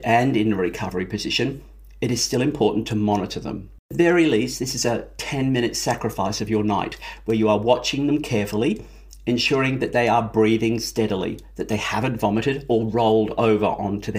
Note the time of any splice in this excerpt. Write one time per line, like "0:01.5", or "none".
0:03.8